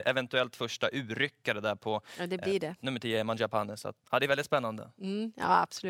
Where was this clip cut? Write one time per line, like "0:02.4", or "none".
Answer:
0:04.0